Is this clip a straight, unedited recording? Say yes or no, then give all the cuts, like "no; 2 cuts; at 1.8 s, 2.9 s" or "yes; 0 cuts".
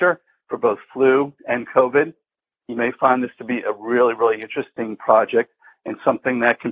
yes; 0 cuts